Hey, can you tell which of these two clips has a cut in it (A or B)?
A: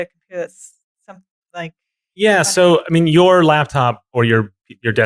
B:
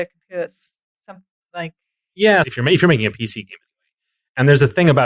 B